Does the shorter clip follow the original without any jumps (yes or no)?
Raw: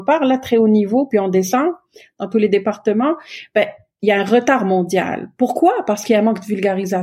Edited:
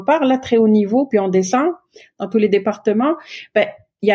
yes